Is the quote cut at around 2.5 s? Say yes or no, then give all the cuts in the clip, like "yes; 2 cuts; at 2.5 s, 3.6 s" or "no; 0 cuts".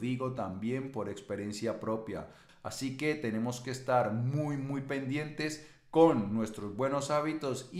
yes; 1 cut; at 2.5 s